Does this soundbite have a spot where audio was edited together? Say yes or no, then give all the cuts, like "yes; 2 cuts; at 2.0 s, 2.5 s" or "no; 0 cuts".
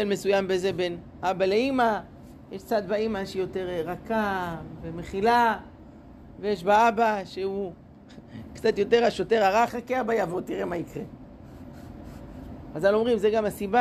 yes; 1 cut; at 9.7 s